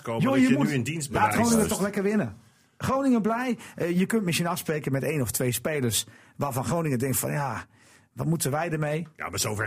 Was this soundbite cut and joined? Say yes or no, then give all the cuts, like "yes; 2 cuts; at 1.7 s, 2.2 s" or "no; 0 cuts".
no; 0 cuts